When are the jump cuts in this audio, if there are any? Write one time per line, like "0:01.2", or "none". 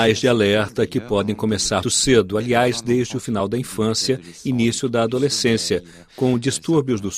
0:01.8